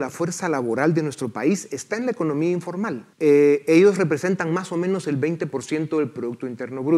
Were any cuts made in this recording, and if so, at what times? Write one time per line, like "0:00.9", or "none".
0:03.1